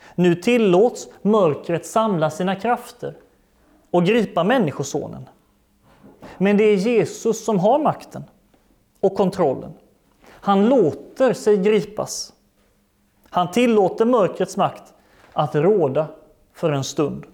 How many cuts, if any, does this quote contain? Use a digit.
0